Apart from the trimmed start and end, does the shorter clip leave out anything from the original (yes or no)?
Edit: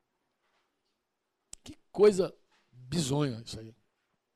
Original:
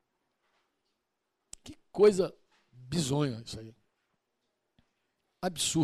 no